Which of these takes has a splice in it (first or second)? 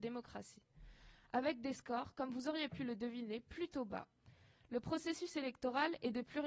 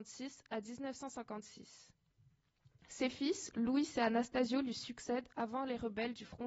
second